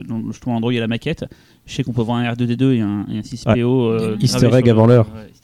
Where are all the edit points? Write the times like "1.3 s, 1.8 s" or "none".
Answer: none